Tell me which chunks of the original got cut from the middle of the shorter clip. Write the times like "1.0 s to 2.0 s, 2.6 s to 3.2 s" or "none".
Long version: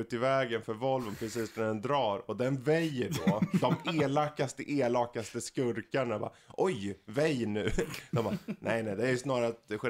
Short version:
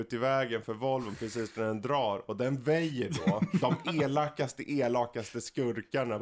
none